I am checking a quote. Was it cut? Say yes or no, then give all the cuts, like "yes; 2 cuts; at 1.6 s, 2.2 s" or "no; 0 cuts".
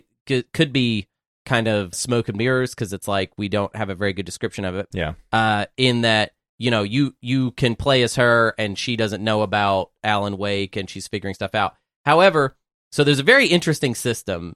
yes; 2 cuts; at 1.9 s, 4.9 s